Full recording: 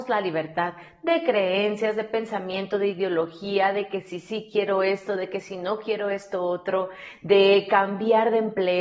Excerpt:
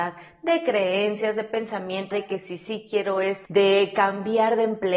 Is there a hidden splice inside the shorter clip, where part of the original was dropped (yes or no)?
yes